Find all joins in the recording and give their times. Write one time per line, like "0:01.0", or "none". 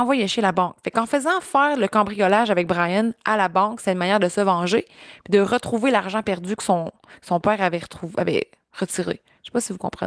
none